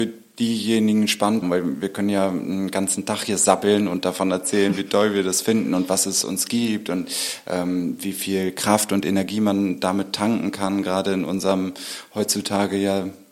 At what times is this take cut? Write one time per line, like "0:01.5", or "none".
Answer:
0:01.4